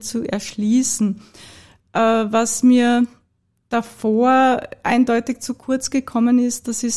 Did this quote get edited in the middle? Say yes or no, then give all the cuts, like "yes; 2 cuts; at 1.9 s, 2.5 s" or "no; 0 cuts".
no; 0 cuts